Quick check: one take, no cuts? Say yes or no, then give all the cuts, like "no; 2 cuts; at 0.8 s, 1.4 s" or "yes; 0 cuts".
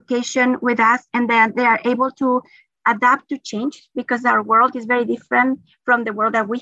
yes; 0 cuts